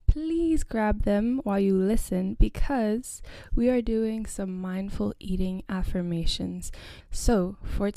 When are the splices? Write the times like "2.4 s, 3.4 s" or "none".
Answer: 7.0 s